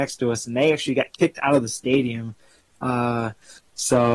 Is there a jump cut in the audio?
no; 0 cuts

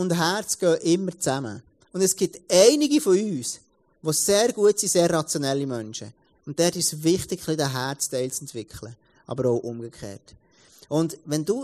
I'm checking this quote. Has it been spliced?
no; 0 cuts

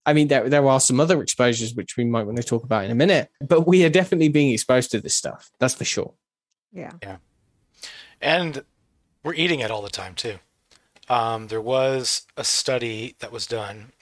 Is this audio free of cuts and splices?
no; 1 cut; at 3.4 s

